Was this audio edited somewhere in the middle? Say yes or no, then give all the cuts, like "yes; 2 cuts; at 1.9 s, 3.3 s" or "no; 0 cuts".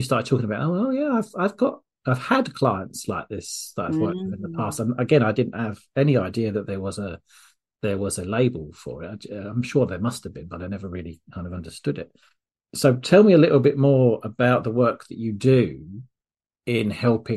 no; 0 cuts